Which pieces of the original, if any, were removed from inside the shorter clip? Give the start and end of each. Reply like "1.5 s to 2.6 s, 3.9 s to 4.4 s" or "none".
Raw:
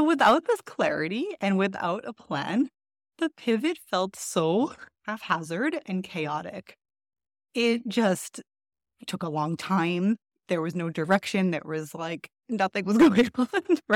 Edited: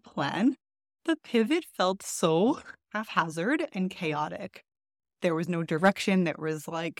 7.3 s to 10.4 s